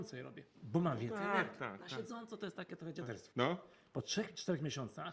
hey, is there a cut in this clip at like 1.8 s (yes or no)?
no